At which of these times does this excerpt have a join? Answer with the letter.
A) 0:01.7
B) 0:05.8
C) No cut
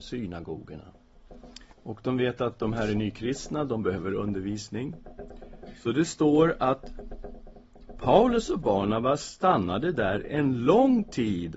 A